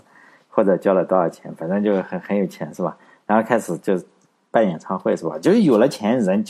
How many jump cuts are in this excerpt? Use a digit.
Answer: 0